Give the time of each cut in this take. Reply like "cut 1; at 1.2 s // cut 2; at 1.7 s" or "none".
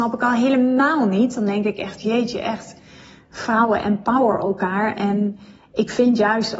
none